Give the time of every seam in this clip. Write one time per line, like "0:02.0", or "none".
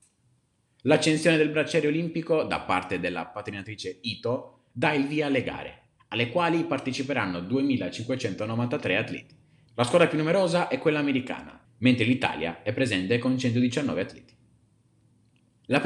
0:09.7
0:11.6